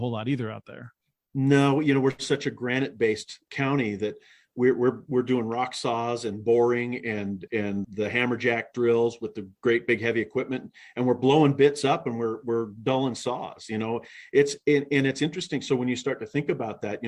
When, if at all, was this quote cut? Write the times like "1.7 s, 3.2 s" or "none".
7.8 s